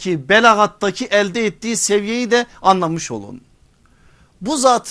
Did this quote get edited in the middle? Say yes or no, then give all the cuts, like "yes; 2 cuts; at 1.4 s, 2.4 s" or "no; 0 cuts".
no; 0 cuts